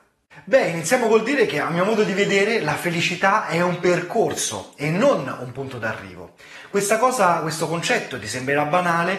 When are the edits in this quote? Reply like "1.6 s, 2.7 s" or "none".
none